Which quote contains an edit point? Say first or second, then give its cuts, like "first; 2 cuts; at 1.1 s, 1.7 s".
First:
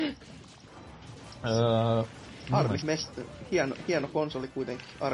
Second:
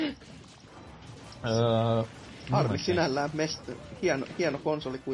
first; 1 cut; at 2.8 s